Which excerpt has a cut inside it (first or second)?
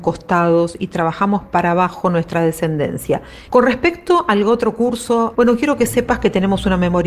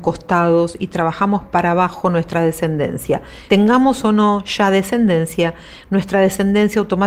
first